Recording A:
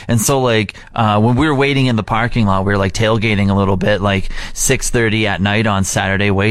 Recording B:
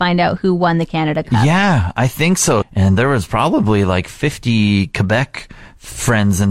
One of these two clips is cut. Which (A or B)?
B